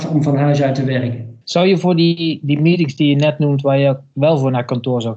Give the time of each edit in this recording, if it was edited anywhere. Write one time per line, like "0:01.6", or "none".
none